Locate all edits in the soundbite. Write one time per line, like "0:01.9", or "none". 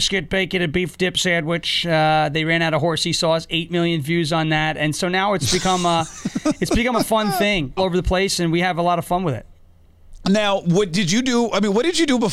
0:07.8